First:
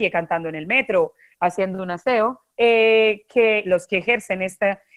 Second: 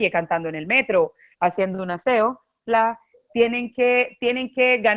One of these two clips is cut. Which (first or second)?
first